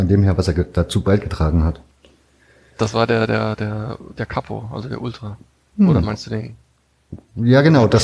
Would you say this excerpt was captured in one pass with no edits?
yes; 0 cuts

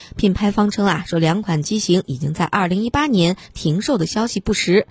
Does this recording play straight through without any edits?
yes; 0 cuts

